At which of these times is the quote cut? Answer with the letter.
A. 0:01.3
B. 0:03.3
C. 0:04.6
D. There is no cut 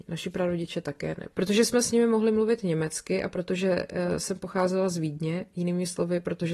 A